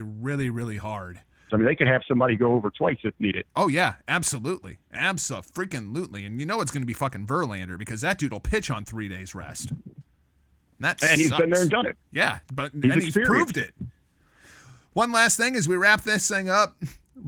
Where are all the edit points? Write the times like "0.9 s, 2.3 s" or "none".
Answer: 1.5 s